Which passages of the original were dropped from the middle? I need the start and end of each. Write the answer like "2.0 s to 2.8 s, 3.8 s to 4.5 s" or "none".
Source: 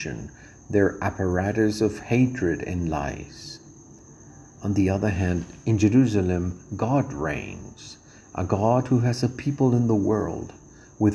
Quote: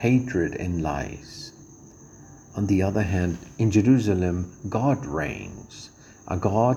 none